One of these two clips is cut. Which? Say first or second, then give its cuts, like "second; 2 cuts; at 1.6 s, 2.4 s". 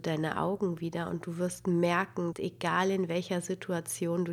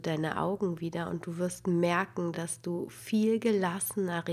first; 1 cut; at 2.3 s